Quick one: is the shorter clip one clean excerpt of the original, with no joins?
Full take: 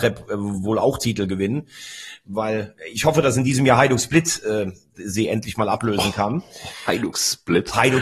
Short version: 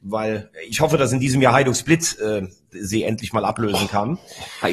yes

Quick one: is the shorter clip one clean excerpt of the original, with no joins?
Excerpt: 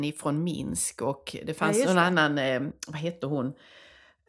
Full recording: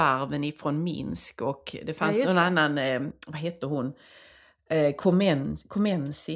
yes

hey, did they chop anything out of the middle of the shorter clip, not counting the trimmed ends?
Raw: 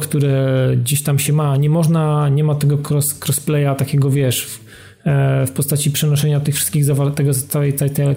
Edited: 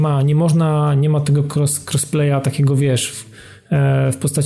no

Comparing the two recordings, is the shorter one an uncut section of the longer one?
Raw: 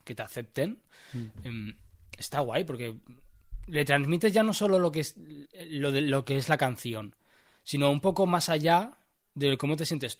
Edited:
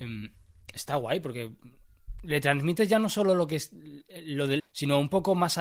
no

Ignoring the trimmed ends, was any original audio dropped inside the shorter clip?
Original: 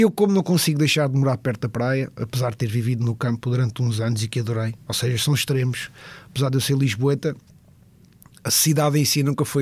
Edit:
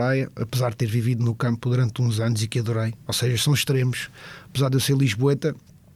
no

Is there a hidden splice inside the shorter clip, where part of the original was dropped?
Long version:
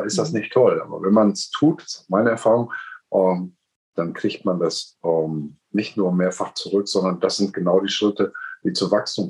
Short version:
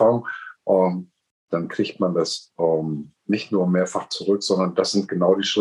no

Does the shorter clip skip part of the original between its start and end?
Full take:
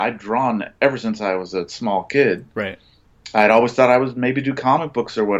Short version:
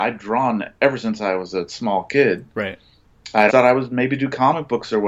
yes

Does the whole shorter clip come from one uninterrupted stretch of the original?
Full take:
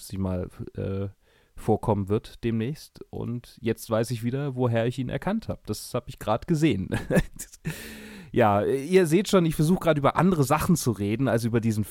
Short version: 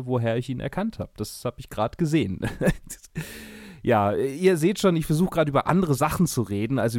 yes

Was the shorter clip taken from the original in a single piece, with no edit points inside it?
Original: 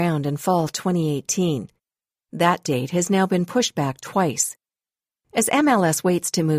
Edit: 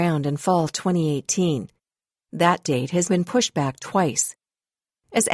no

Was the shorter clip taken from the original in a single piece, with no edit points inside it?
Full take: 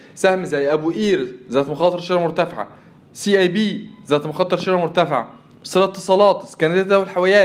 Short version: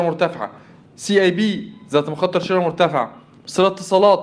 yes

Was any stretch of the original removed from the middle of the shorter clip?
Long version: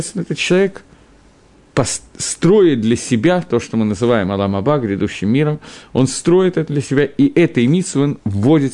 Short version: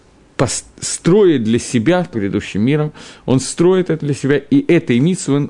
yes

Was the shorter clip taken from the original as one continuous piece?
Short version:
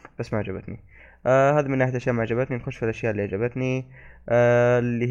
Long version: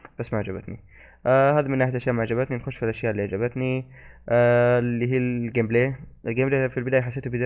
yes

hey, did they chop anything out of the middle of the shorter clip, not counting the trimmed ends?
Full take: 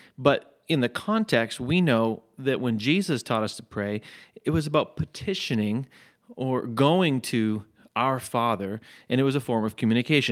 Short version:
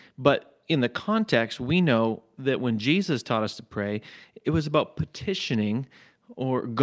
no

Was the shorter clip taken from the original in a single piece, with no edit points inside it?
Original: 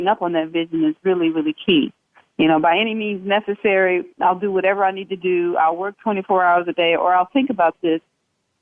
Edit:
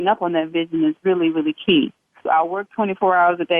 no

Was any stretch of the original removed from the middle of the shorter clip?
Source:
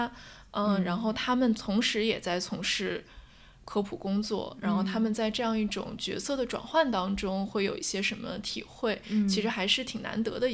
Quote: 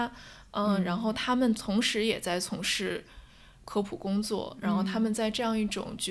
no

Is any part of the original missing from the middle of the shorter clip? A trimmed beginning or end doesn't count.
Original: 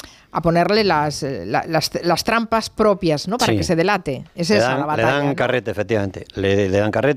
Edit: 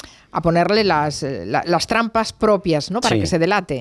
yes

